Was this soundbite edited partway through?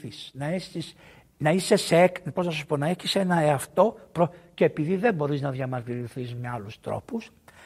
no; 0 cuts

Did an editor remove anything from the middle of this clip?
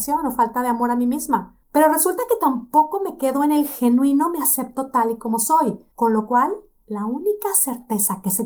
yes; 1 cut; at 5.9 s

